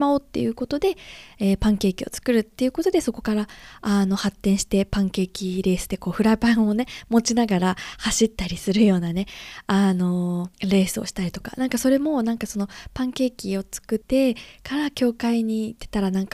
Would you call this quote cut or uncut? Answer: cut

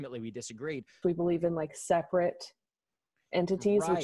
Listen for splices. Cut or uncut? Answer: cut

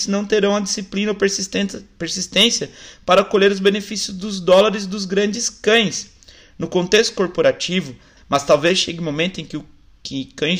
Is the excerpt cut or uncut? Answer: cut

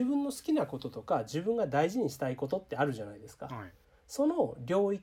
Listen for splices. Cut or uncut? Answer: cut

